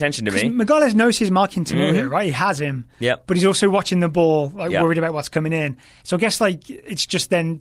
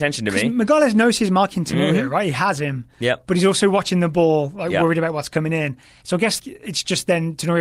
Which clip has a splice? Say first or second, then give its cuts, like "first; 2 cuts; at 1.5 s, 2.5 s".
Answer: second; 1 cut; at 6.4 s